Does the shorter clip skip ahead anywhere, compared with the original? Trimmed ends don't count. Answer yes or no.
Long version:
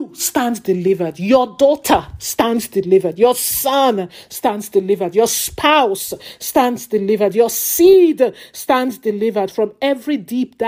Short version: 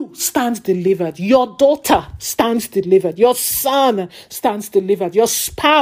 no